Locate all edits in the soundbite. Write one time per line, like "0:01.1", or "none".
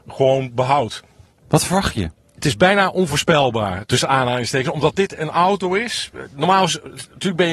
none